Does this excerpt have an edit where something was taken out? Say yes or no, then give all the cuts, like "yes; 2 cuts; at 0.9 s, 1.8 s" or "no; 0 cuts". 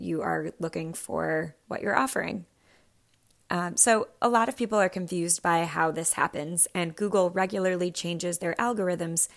no; 0 cuts